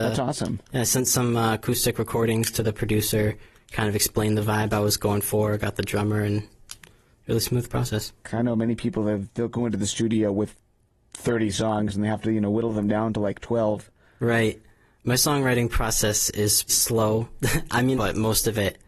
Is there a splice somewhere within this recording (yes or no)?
yes